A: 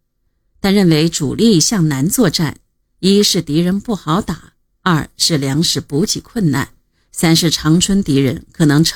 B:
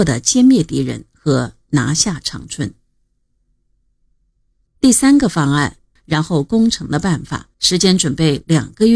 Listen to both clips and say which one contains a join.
B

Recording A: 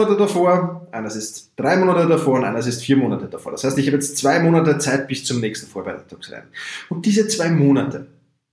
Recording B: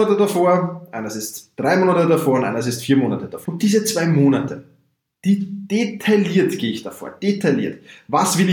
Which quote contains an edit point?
B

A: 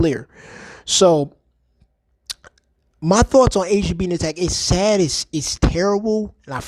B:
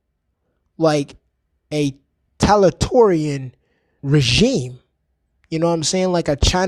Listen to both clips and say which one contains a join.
B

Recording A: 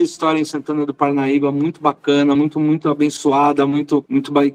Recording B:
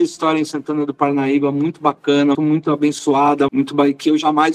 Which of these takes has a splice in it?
B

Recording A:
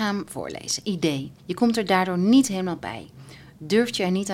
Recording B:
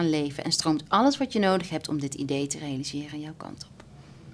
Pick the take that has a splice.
A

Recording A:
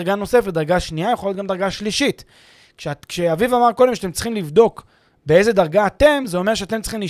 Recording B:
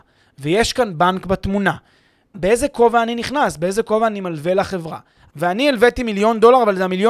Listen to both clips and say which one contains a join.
B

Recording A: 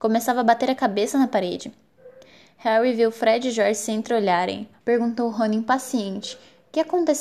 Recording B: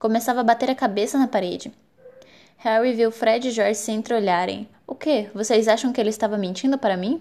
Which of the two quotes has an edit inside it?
A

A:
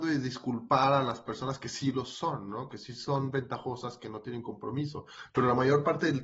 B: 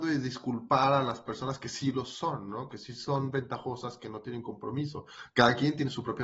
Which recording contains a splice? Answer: A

